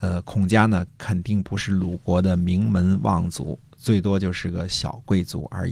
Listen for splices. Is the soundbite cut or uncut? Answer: uncut